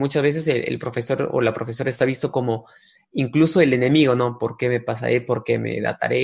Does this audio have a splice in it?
no; 0 cuts

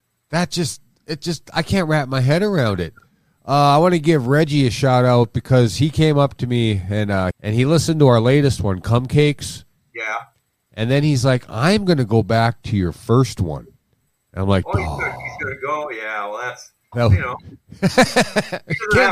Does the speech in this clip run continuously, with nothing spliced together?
no; 2 cuts; at 7.3 s, 16.9 s

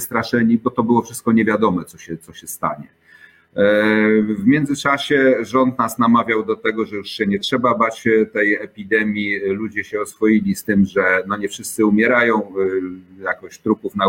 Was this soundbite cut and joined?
no; 0 cuts

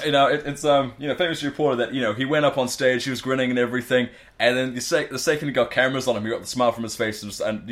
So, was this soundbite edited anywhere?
no; 0 cuts

